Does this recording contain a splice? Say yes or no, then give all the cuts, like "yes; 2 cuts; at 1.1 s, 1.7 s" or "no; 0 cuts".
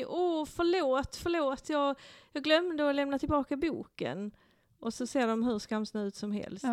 no; 0 cuts